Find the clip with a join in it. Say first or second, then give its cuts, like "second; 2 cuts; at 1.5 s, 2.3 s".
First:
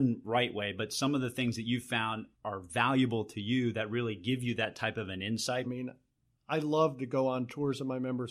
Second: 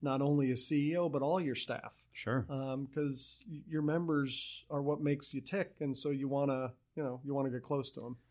first; 2 cuts; at 2.3 s, 5.6 s